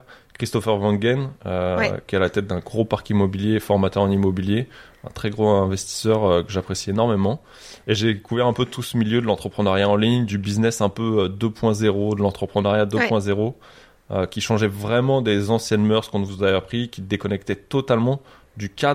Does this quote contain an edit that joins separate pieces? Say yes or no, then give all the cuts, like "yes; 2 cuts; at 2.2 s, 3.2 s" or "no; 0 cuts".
no; 0 cuts